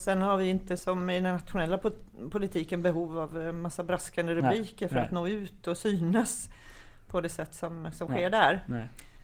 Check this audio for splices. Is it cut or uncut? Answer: uncut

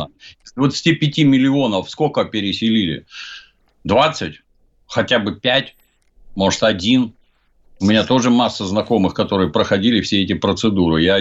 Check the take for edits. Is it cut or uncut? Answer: uncut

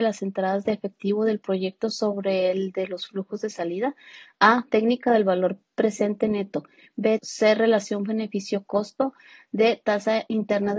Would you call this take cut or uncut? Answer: cut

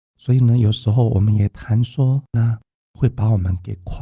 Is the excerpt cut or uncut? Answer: cut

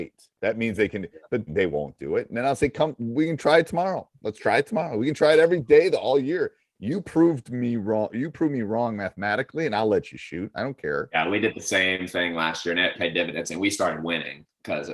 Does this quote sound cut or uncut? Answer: cut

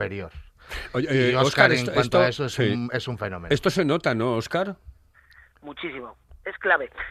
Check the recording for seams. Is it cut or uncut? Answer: uncut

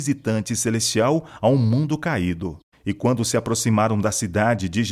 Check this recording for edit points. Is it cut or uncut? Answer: cut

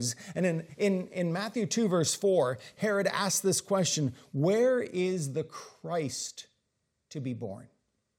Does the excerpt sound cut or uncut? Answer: uncut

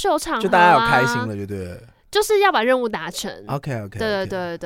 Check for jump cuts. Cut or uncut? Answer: uncut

